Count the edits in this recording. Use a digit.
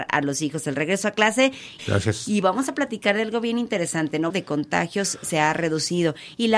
2